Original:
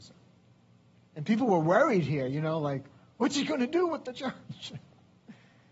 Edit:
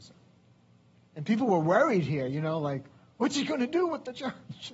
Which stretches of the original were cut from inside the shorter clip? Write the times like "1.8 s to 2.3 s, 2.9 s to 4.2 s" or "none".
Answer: none